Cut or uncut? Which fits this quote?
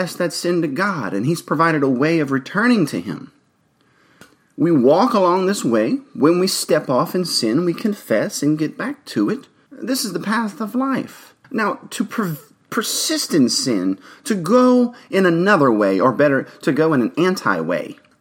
cut